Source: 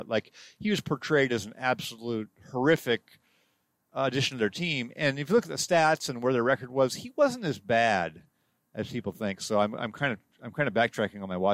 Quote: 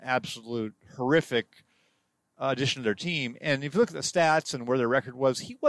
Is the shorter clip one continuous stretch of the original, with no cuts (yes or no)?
yes